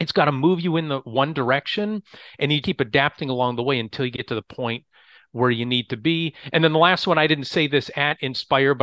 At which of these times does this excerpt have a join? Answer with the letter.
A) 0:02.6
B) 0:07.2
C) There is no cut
A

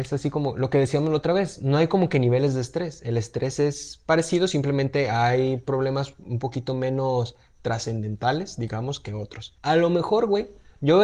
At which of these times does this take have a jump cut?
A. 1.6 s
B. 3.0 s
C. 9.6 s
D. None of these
C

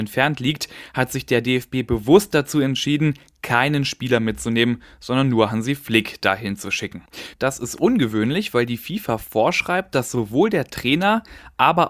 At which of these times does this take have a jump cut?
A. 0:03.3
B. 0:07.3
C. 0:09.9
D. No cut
B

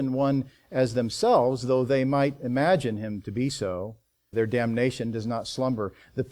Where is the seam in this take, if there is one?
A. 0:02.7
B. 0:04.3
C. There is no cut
B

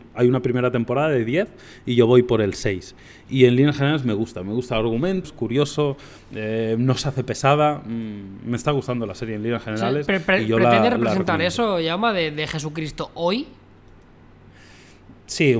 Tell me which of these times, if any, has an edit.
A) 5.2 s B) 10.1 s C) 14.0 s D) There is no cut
A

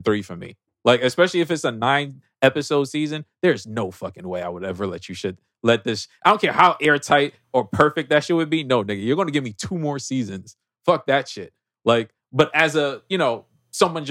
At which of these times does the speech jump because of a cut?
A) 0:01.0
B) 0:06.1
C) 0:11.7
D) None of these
D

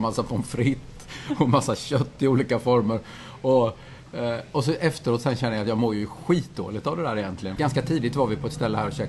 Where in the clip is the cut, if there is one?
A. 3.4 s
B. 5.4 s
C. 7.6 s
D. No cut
C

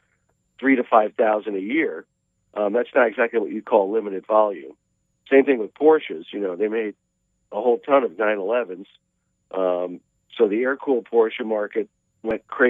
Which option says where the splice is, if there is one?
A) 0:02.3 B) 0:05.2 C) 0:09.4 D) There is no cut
D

